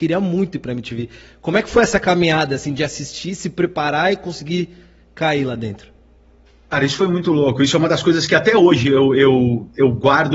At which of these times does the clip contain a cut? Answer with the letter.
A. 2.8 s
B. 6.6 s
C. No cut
C